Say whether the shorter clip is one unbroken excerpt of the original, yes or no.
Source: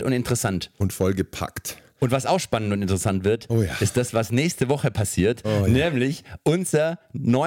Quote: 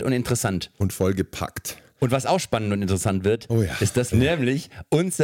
no